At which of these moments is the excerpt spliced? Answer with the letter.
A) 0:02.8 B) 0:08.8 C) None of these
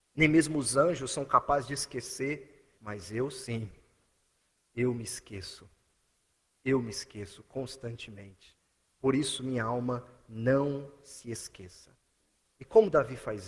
A